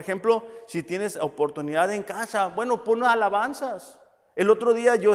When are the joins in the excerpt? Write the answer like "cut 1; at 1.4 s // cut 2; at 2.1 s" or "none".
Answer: none